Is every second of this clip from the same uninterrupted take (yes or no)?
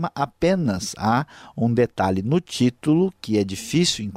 yes